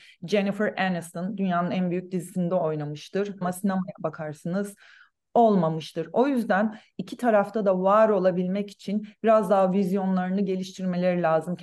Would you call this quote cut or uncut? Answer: cut